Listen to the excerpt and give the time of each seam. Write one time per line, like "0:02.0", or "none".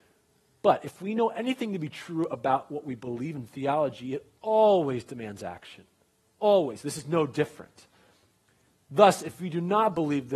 none